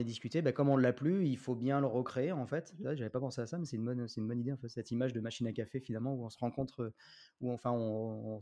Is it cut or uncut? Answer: uncut